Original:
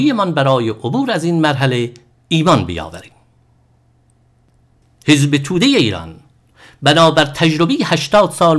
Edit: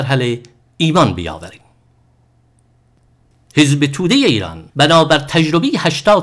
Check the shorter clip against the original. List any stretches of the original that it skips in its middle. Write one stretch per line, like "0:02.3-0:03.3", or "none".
0:06.2-0:06.8